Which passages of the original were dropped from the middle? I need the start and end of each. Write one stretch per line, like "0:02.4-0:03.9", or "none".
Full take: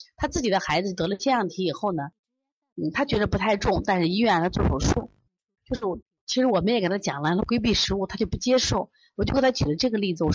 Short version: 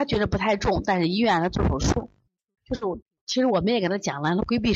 none

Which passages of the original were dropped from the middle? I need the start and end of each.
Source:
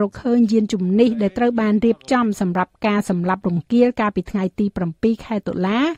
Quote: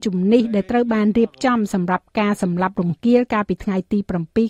none

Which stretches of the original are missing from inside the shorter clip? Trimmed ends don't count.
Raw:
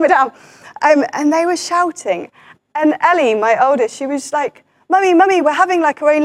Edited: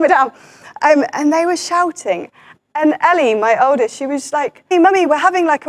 0:04.7-0:05.1

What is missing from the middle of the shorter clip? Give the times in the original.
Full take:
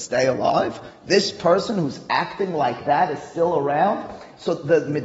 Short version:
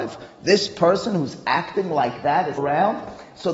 0:03.2-0:03.6

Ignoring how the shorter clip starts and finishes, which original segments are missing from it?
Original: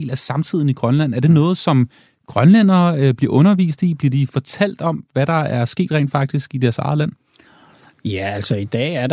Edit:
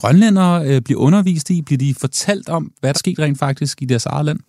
0:05.3-0:05.7

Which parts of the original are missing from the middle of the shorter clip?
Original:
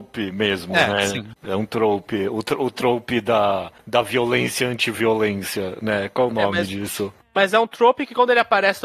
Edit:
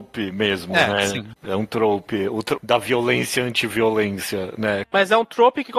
0:02.6-0:03.8
0:06.1-0:07.3

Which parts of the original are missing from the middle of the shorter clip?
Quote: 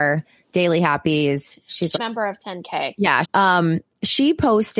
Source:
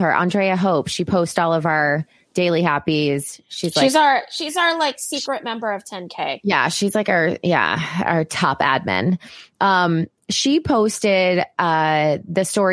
0:03.8-0:05.4
0:06.7-0:09.5

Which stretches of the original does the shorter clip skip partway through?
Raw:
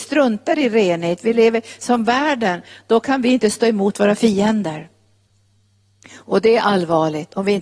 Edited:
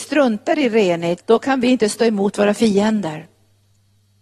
0:01.2-0:02.8

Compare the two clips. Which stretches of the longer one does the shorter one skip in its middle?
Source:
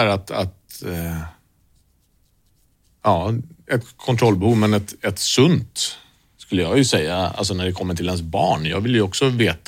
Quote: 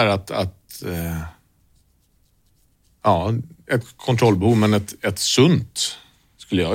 none

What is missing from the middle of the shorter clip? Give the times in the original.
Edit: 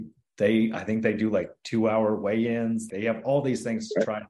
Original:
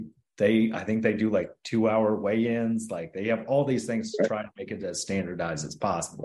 0:02.9-0:03.1

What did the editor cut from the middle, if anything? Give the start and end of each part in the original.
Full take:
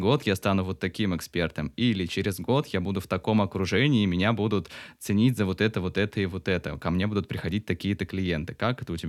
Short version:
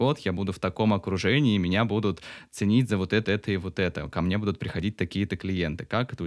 0:05.7-0:05.9

